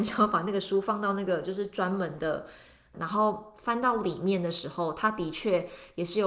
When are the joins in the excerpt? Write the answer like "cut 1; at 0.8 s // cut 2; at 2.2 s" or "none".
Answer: cut 1; at 2.9 s